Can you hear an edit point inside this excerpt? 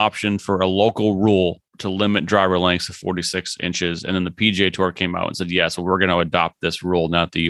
yes; 1 cut; at 1.7 s

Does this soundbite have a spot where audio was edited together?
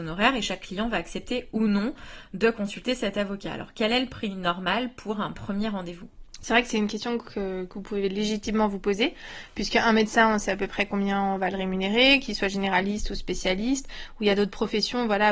no; 0 cuts

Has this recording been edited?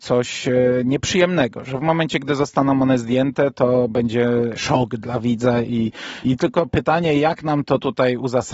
yes; 1 cut; at 6.2 s

